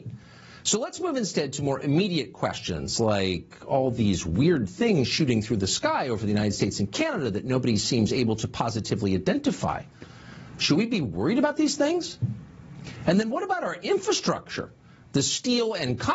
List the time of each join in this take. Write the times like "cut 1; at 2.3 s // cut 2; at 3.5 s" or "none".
none